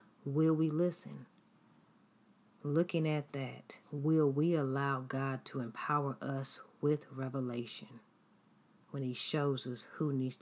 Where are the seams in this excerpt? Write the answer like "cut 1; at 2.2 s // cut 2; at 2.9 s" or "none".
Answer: cut 1; at 2.5 s // cut 2; at 3.8 s